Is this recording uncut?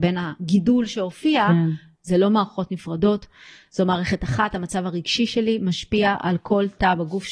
no; 1 cut; at 2.0 s

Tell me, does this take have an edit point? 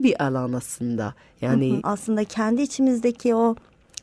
yes; 1 cut; at 1.8 s

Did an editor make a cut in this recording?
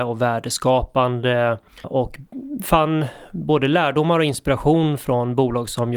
yes; 1 cut; at 1.8 s

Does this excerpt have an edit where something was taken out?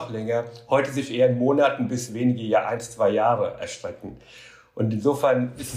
no; 0 cuts

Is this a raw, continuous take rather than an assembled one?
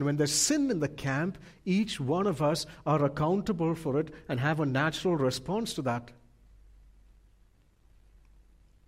yes; 0 cuts

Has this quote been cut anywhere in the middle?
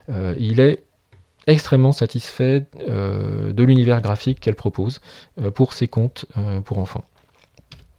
no; 0 cuts

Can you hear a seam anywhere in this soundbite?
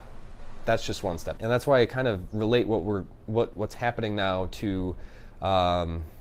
yes; 1 cut; at 1.4 s

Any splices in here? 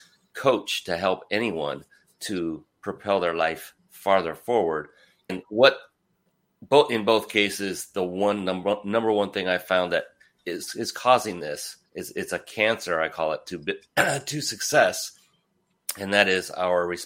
yes; 2 cuts; at 5.3 s, 11.8 s

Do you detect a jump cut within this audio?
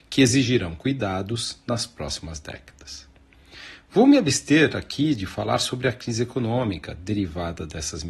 no; 0 cuts

